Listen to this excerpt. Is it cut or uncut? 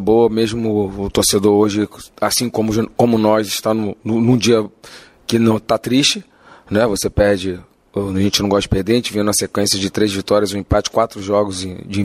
uncut